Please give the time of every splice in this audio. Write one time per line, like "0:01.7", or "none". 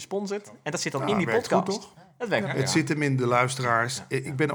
0:02.4

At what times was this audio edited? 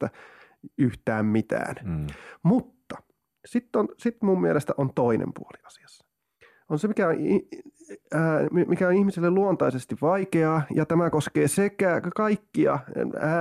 0:08.7

